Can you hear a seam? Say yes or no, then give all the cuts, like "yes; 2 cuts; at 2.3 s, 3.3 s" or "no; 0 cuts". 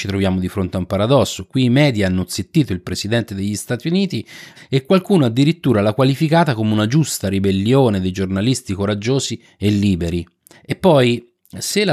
yes; 2 cuts; at 4.6 s, 10.5 s